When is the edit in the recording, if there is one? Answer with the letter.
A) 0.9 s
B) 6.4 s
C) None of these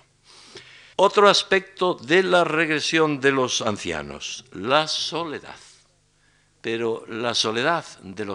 A